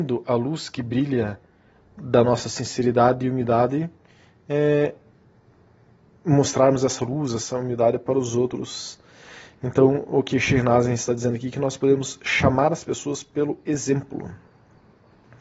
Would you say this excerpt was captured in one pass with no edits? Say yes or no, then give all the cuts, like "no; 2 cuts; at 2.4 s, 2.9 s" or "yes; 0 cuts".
yes; 0 cuts